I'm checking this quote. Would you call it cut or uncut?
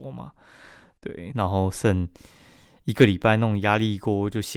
cut